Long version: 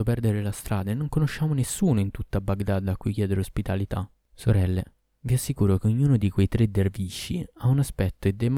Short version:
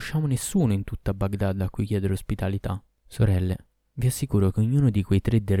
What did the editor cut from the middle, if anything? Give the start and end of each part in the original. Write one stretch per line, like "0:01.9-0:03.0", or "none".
none